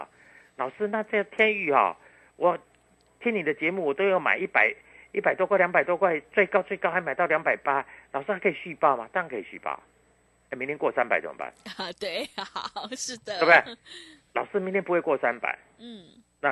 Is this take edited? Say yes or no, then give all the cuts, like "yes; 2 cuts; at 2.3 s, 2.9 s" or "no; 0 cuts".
no; 0 cuts